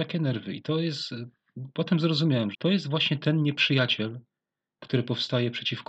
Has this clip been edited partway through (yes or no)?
yes